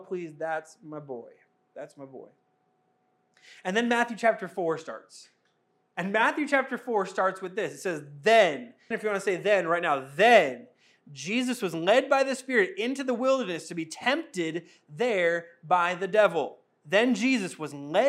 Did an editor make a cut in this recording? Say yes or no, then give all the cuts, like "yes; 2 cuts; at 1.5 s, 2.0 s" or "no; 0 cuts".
yes; 1 cut; at 8.9 s